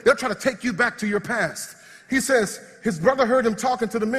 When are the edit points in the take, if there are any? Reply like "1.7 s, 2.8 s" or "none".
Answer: 2.7 s